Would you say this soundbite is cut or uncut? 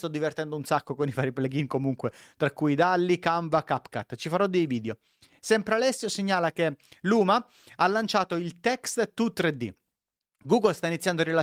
uncut